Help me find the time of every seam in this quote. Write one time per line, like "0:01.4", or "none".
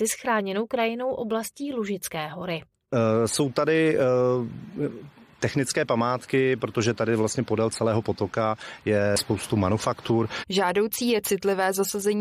0:10.4